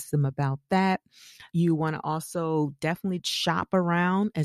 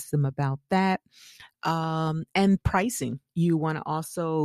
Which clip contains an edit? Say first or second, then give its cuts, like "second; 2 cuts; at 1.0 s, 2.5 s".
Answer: first; 2 cuts; at 1.5 s, 3.2 s